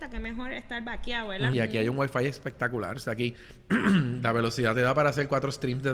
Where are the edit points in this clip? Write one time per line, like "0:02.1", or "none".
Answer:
0:01.5